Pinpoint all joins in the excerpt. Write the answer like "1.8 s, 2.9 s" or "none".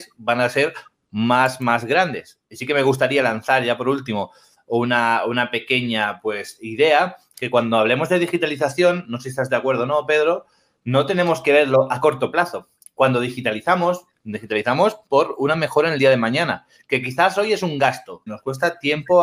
14.1 s, 18.3 s